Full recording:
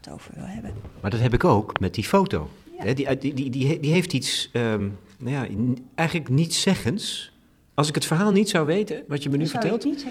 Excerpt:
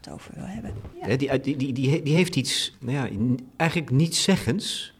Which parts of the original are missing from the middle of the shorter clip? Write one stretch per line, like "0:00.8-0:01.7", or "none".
0:00.9-0:02.7
0:04.5-0:05.1